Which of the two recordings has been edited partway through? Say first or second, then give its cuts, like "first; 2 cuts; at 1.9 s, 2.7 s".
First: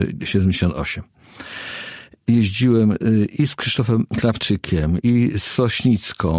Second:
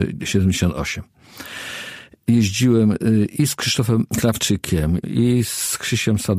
second; 1 cut; at 5.0 s